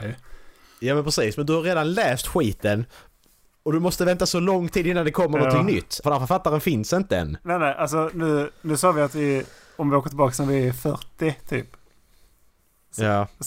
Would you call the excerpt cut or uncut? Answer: cut